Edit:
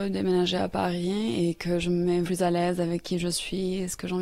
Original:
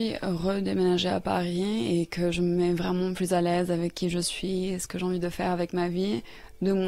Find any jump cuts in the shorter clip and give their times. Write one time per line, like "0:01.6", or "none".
0:02.2